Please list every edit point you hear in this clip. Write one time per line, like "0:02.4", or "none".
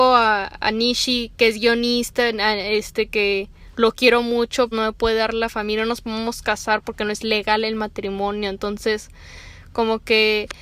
0:04.7